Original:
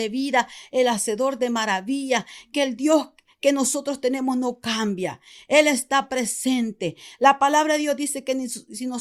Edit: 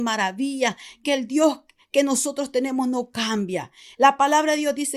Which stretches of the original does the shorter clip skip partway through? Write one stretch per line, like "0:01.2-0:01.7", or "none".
0:05.4-0:07.2